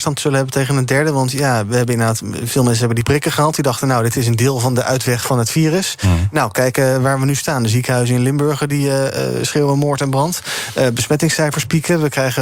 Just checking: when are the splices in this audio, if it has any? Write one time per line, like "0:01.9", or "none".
none